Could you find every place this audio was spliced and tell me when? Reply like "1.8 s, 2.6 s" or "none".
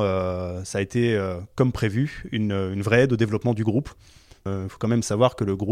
none